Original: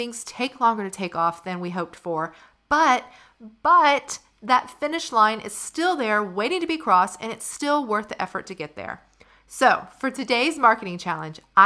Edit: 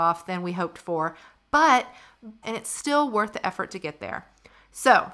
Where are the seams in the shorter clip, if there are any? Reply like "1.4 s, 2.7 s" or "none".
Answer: 2.4 s

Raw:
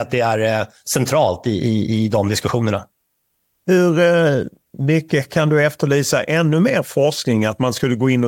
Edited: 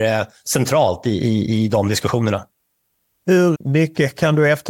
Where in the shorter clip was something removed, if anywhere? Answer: 3.5 s

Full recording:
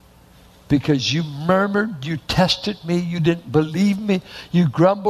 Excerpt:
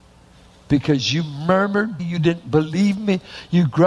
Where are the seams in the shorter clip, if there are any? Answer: 2.0 s

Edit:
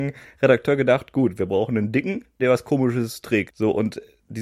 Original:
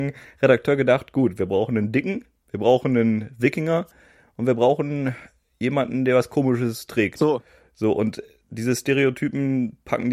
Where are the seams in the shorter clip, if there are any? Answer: 2.4 s, 3.5 s

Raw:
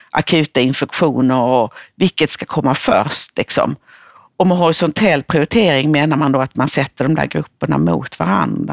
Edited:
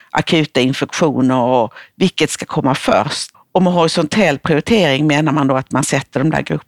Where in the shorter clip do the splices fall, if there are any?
3.3 s

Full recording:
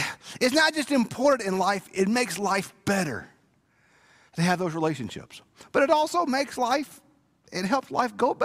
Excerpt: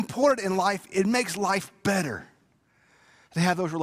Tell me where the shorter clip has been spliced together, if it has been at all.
none

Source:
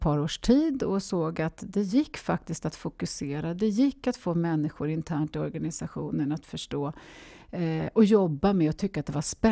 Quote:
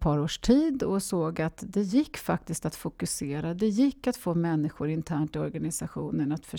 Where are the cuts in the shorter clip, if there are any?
none

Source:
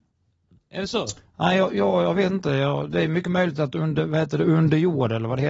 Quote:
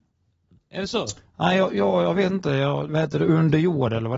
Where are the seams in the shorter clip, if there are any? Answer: 2.9 s

